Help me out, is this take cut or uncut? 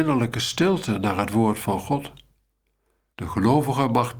cut